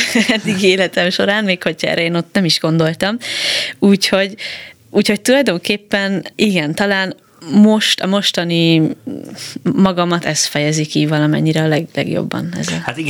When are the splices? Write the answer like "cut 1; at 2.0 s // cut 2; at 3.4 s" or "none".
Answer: cut 1; at 6.3 s